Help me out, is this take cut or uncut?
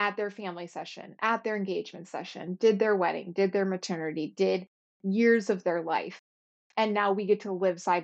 uncut